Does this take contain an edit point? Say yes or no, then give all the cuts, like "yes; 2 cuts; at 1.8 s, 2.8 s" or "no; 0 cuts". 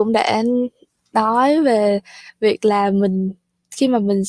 no; 0 cuts